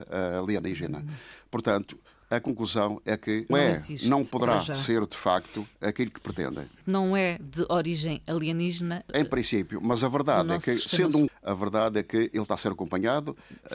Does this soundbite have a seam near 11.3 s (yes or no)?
yes